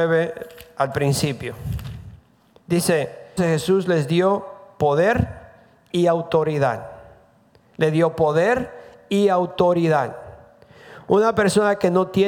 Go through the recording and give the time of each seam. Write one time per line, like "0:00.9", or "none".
0:03.4